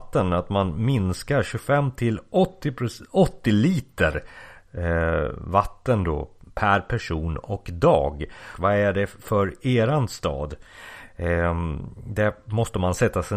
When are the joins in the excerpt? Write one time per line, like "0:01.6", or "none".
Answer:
0:08.5